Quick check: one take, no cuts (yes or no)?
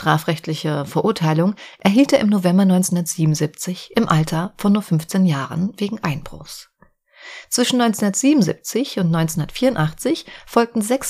yes